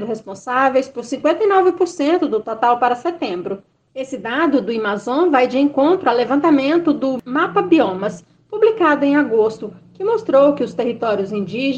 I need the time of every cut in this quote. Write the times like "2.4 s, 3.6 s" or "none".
3.9 s